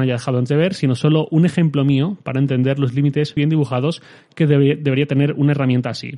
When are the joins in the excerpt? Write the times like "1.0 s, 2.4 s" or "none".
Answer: 3.4 s